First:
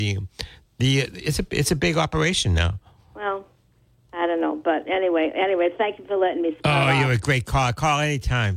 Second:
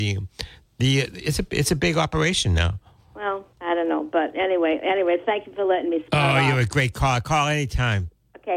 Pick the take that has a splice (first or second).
second